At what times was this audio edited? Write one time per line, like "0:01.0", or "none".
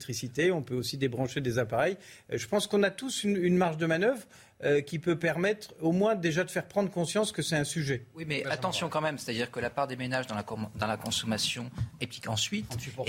0:12.0